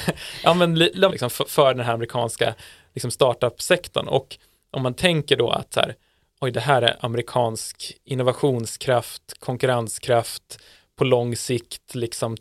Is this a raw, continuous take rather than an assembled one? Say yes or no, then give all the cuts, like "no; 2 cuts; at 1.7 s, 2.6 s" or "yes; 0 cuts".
no; 1 cut; at 1.1 s